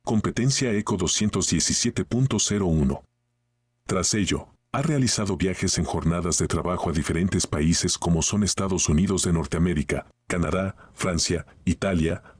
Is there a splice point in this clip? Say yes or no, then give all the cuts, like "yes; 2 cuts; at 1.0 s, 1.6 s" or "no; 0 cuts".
no; 0 cuts